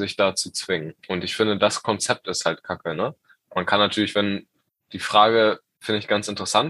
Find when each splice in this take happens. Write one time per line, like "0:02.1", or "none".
0:01.0